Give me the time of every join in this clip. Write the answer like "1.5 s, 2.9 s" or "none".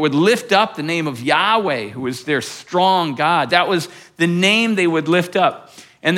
3.5 s